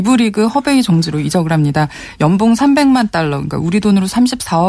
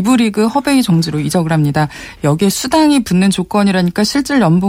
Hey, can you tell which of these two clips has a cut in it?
second; 1 cut; at 2.2 s

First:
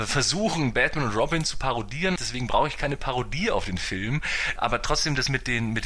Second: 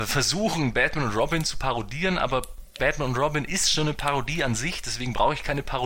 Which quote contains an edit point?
first; 2 cuts; at 2.2 s, 4.6 s

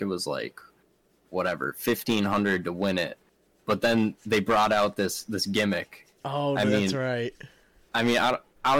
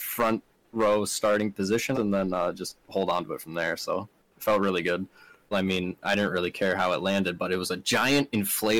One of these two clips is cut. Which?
second; 2 cuts; at 1.9 s, 5.5 s

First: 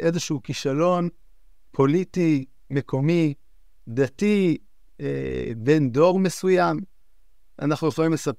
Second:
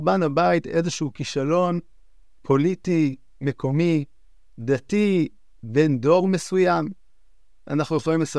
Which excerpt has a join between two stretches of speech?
second; 1 cut; at 5.6 s

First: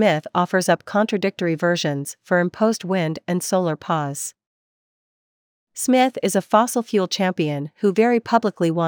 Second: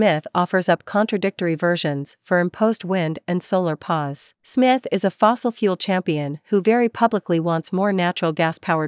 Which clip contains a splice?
second; 1 cut; at 4.4 s

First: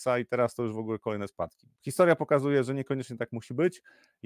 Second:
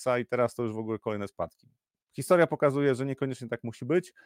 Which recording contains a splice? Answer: first; 1 cut; at 1.8 s

